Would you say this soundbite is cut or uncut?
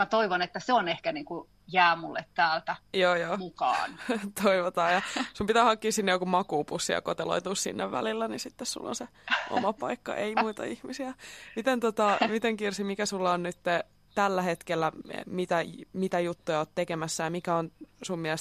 cut